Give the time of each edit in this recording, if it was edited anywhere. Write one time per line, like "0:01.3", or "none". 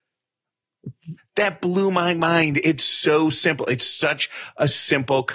0:01.2